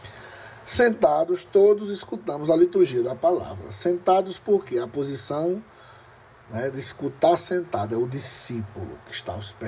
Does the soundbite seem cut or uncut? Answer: uncut